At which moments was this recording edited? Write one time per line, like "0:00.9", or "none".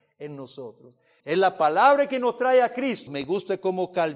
0:01.2
0:03.1